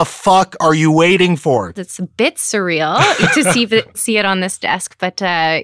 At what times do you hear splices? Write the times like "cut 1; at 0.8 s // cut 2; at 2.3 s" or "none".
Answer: cut 1; at 1.7 s // cut 2; at 3.9 s